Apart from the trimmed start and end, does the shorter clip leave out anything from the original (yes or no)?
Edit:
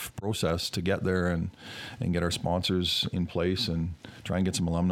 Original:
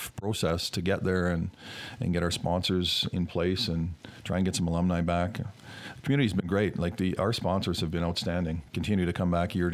no